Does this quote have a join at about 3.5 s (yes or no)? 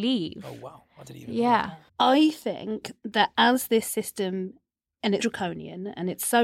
no